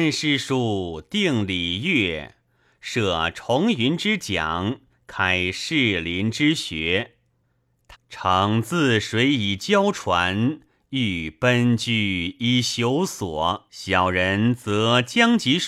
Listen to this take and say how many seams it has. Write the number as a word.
two